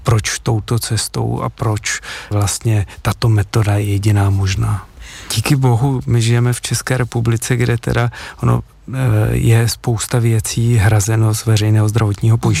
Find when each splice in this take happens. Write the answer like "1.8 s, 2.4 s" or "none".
2.3 s, 5.3 s